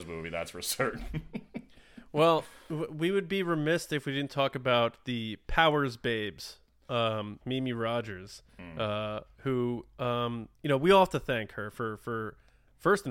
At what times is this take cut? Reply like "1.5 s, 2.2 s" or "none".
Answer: 7.4 s, 10.6 s